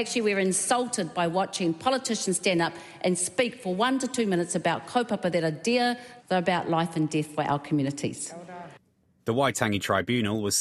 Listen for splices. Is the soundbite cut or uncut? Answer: cut